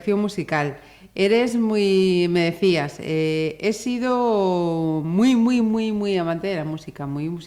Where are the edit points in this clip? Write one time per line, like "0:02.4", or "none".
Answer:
0:05.6